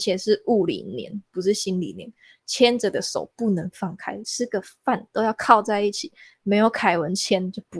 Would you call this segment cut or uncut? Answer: uncut